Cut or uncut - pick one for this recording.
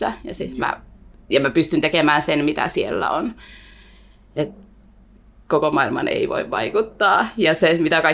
uncut